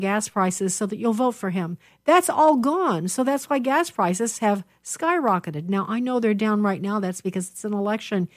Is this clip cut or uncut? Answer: cut